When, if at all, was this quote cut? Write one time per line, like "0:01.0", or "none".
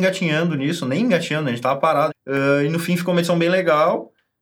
0:02.1